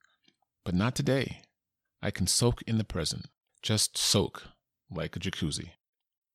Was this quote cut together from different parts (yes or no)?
yes